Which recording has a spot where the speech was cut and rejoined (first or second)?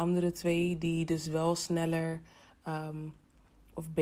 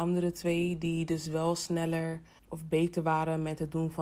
second